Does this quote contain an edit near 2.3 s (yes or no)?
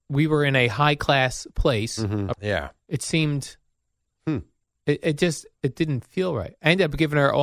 yes